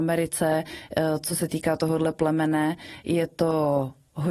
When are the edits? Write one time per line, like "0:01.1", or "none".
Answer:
none